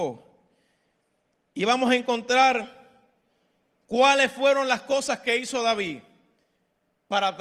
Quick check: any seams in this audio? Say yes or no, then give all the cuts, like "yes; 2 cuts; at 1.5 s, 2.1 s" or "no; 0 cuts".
no; 0 cuts